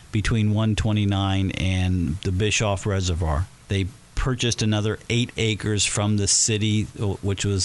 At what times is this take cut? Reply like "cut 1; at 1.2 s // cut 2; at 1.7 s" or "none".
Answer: cut 1; at 3.6 s